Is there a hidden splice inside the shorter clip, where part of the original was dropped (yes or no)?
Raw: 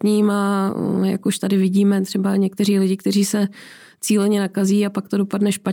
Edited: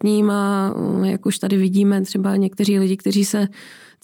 no